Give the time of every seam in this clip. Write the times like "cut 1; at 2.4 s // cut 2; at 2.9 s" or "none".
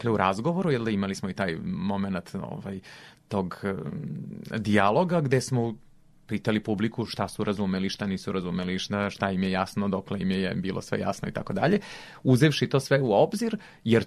none

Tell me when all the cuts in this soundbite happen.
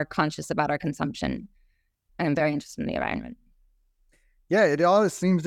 cut 1; at 2.1 s

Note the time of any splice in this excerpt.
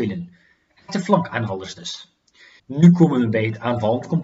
cut 1; at 2.6 s

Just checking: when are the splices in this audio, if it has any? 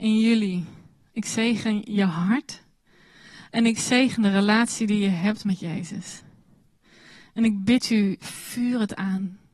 cut 1; at 8.2 s

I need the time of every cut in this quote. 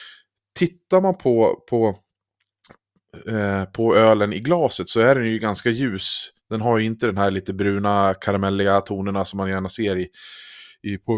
none

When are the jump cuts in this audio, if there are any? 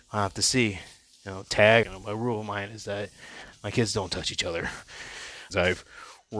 cut 1; at 1.8 s // cut 2; at 5.5 s

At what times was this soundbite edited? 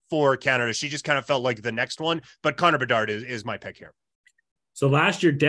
none

